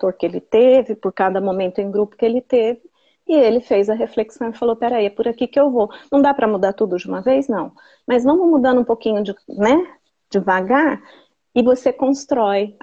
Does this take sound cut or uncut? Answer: uncut